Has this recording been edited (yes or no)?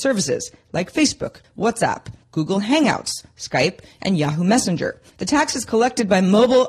yes